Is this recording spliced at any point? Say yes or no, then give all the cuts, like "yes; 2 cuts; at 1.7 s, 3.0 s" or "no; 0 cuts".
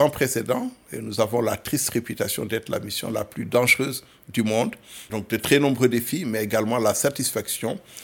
yes; 1 cut; at 5.1 s